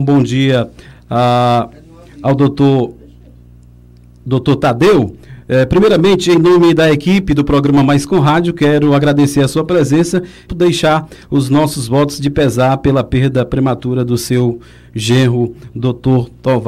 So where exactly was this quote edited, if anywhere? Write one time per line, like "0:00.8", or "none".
0:10.5